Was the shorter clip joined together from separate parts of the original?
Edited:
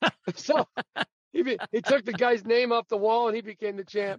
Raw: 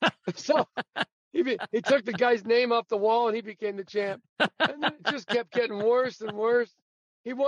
no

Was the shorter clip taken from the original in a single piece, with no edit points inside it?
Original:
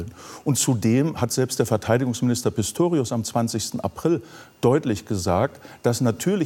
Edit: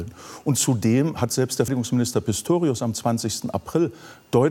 no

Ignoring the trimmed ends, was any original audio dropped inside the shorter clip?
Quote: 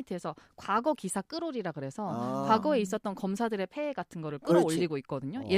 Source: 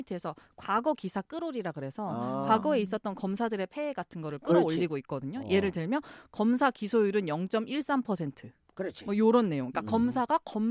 no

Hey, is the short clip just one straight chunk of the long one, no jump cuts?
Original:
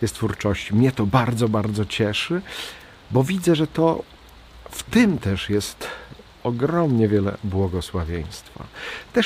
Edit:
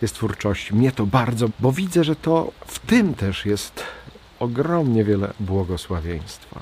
no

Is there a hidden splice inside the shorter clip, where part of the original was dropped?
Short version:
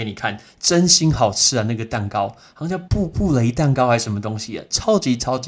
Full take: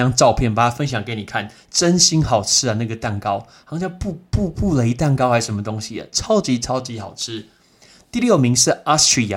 yes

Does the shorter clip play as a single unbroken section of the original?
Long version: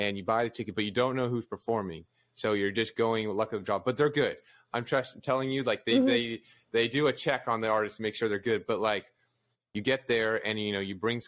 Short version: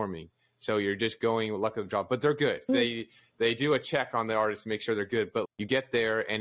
no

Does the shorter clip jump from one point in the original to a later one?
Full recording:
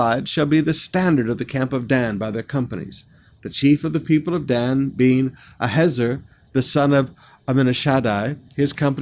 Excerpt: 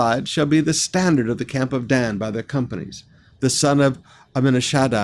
yes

